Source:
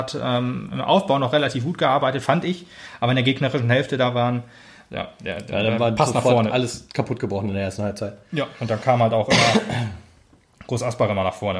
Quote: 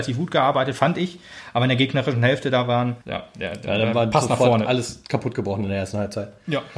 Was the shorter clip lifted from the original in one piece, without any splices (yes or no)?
no